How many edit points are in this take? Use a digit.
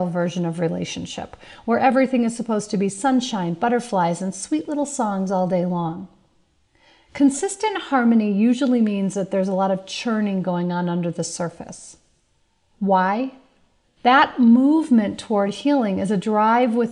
1